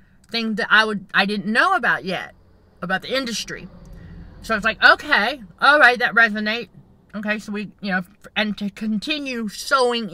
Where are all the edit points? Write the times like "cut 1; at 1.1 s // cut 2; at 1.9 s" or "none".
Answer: none